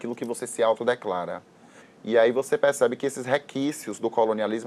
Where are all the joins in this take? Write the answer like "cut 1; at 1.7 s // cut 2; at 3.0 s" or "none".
cut 1; at 1.8 s